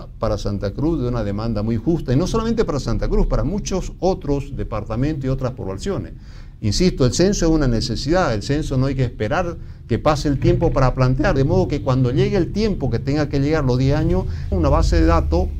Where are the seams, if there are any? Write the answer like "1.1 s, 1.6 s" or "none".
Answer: 11.4 s, 14.5 s

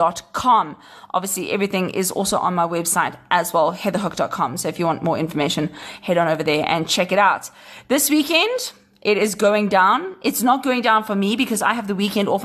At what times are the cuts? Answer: none

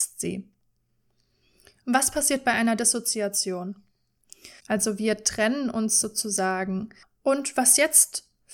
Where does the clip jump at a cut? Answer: 1.8 s, 4.6 s, 7.0 s

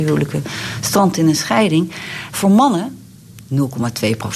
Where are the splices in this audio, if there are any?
2.3 s

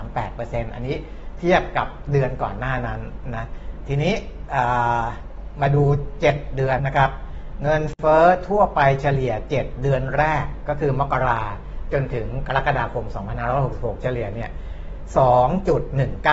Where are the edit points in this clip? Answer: 6.8 s

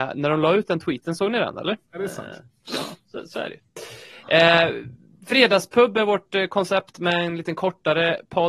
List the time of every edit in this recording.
1.8 s

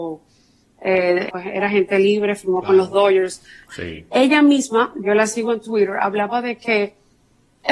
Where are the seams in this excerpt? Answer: 1.3 s, 3.7 s

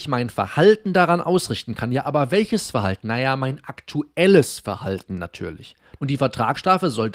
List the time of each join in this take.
6.0 s

